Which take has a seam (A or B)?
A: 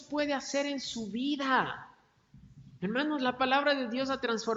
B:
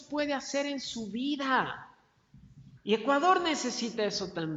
B